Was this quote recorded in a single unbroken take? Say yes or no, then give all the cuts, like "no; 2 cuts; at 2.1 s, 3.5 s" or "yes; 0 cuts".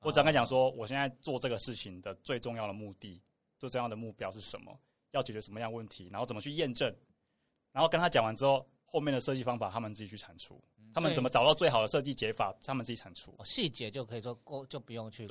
yes; 0 cuts